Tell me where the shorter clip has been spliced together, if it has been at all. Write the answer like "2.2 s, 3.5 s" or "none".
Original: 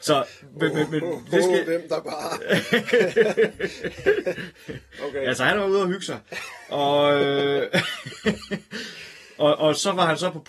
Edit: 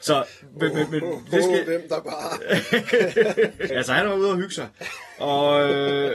3.7 s